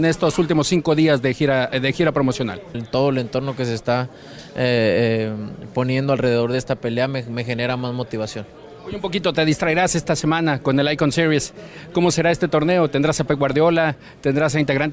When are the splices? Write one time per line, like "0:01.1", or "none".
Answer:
0:02.7